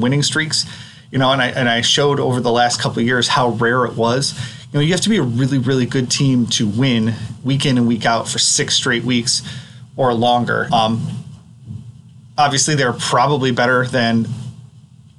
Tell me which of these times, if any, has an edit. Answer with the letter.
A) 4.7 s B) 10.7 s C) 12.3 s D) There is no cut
B